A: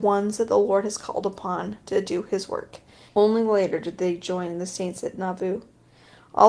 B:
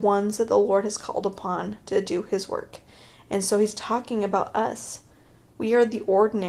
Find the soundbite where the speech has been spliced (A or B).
A